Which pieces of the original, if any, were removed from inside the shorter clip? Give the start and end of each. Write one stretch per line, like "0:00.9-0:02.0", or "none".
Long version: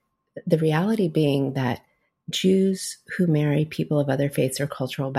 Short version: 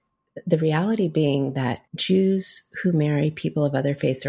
0:01.9-0:02.2